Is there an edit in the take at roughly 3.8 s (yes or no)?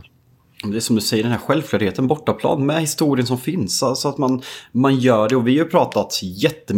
no